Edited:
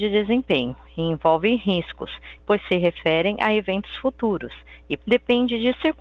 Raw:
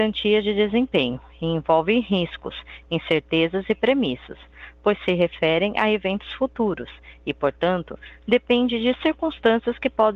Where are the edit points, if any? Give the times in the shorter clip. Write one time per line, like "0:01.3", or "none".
0:02.4
0:05.0